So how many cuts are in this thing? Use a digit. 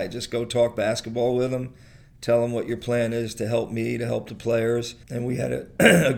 1